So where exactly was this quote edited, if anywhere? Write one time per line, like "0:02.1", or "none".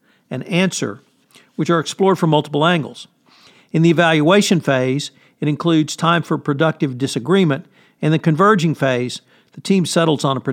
none